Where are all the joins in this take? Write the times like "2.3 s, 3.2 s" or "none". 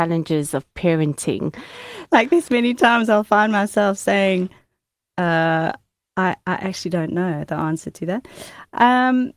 2.1 s